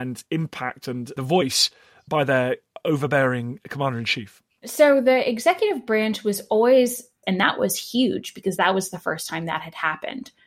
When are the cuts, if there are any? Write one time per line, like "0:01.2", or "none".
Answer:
0:07.2